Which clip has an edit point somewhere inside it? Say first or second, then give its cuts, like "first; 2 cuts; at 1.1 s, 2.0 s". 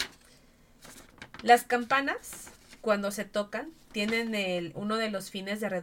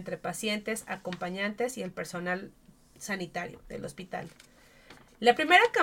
first; 1 cut; at 4.7 s